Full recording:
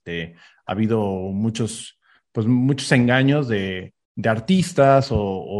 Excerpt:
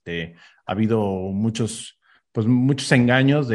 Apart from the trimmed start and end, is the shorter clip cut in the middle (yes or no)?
no